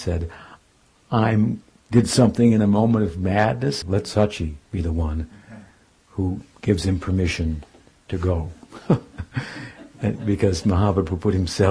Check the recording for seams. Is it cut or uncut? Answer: cut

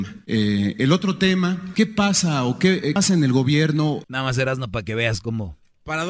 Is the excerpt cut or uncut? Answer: cut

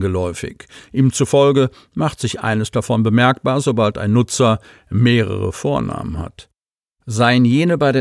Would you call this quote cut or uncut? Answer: uncut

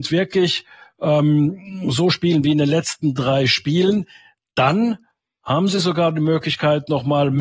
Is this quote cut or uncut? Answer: uncut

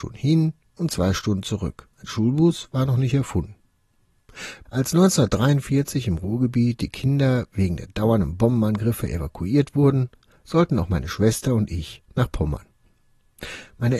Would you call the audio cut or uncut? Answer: cut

